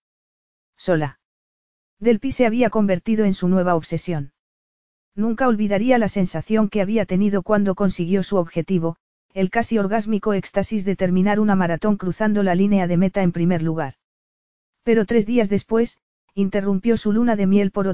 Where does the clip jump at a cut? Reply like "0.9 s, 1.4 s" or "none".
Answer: 1.8 s